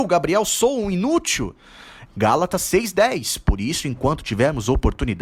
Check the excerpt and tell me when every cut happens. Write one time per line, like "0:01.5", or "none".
0:02.1